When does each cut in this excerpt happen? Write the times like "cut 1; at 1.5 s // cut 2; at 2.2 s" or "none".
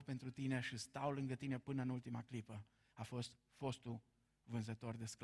none